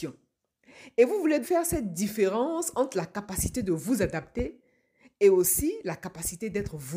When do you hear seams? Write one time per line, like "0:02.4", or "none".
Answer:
0:01.4